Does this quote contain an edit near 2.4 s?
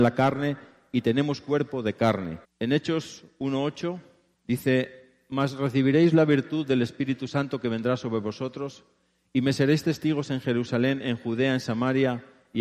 yes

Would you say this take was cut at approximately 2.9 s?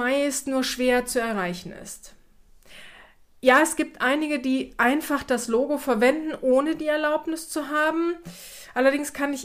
no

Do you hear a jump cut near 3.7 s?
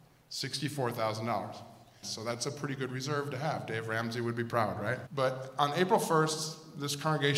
no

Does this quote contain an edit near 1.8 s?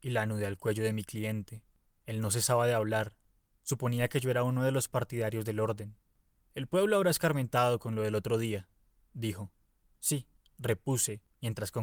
no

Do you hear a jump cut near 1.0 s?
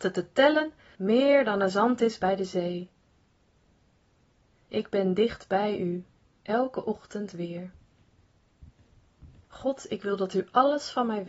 yes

